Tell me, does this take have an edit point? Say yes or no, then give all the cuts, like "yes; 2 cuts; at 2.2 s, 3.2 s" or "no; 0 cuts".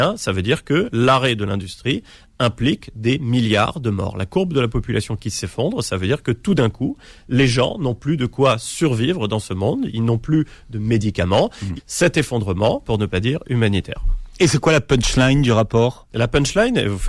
yes; 2 cuts; at 11.8 s, 12.8 s